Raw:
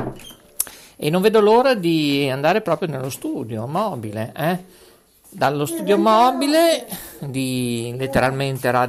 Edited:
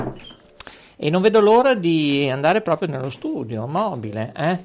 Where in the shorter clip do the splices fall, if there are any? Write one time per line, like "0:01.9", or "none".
none